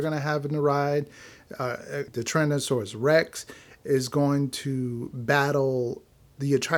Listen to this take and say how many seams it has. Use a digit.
1